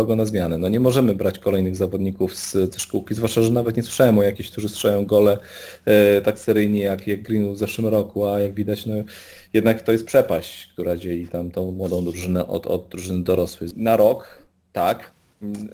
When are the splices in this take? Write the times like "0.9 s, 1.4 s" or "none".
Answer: 13.7 s